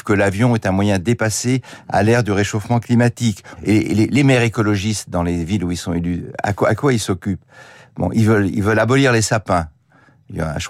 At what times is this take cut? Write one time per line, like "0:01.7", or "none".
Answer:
0:03.6